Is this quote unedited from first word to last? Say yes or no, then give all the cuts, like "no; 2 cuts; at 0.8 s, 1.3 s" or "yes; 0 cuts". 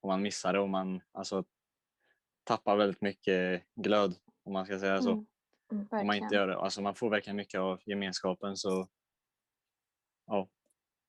yes; 0 cuts